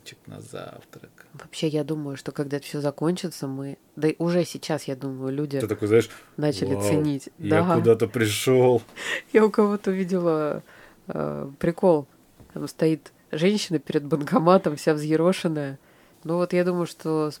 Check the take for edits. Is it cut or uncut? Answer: cut